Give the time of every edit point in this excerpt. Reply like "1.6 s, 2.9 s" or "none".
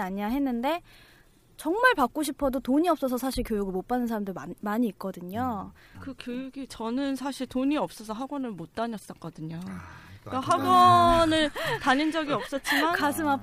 5.9 s